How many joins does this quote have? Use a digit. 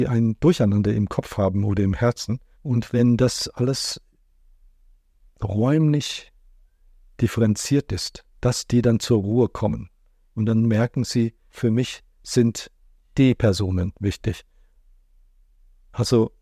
3